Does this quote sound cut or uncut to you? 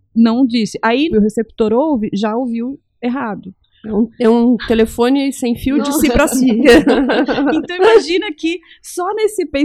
cut